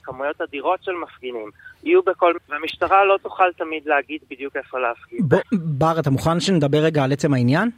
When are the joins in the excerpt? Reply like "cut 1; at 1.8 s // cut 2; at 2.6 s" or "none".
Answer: cut 1; at 2.4 s // cut 2; at 5.4 s

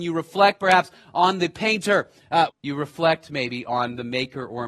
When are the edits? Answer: cut 1; at 2.5 s

